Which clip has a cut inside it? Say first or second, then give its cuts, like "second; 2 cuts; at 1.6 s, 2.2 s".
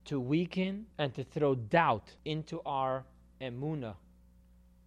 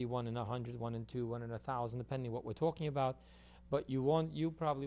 first; 2 cuts; at 0.9 s, 2.2 s